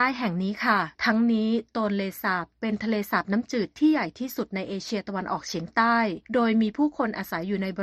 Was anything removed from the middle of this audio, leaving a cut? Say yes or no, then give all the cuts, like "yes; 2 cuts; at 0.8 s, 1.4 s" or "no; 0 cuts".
yes; 2 cuts; at 0.9 s, 6.2 s